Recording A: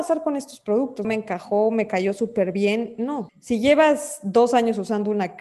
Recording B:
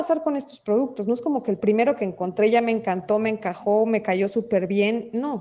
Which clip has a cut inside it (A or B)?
A